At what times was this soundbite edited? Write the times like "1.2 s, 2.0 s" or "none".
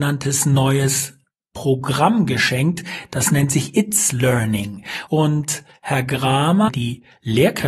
5.1 s, 6.7 s